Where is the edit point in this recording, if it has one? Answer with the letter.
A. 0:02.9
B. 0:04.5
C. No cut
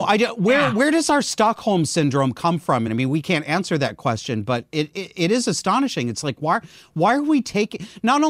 A